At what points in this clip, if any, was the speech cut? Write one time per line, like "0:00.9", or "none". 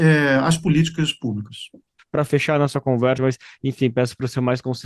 0:02.0
0:03.2